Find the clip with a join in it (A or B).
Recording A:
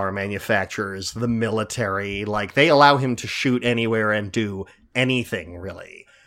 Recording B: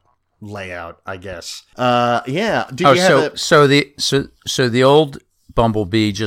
B